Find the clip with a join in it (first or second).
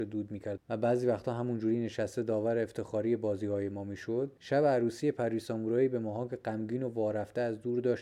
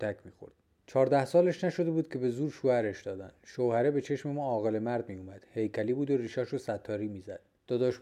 second